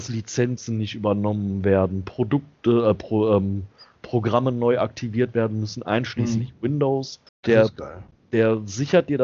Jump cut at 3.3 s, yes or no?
no